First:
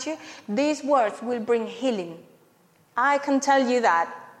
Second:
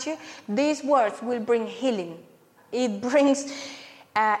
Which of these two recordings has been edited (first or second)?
second